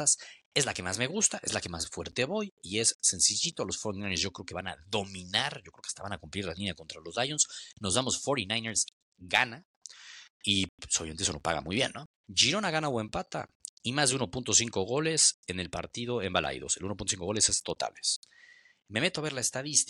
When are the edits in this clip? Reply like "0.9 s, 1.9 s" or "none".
12.1 s